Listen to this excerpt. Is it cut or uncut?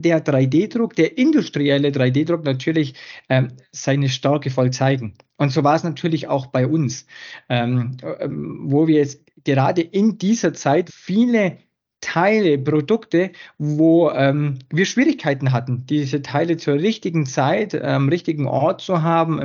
cut